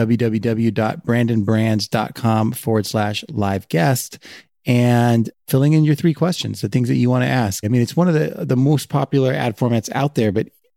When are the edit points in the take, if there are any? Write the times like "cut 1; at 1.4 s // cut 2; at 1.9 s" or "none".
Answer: cut 1; at 5.4 s // cut 2; at 7.6 s